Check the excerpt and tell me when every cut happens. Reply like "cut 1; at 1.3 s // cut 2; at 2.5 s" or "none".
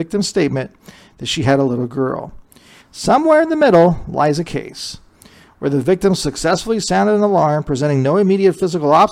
cut 1; at 2.8 s